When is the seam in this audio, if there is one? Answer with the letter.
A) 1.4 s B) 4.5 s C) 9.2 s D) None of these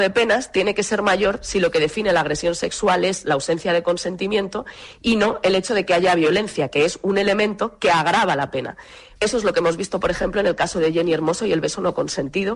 C